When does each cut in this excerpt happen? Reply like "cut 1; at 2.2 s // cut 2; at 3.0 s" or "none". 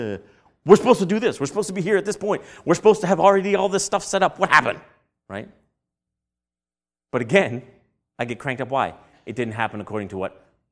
none

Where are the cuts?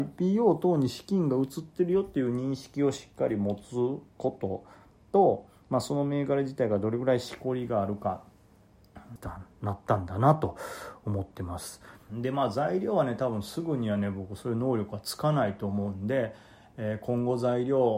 cut 1; at 9.2 s // cut 2; at 12.1 s

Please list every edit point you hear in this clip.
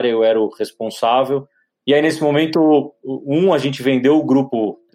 cut 1; at 1.8 s

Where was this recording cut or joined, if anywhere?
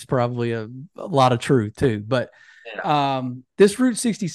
none

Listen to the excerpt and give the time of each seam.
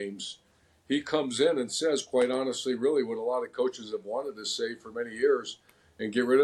none

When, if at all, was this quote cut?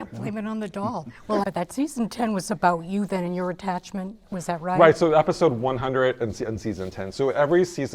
cut 1; at 1.4 s

